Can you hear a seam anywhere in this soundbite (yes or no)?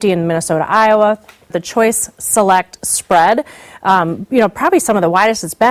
yes